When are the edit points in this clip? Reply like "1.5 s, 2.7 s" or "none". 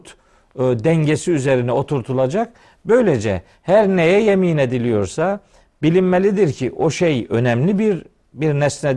none